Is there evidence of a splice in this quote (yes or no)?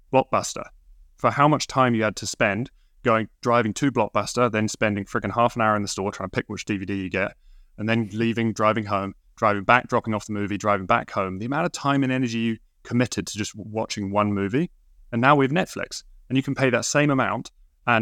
no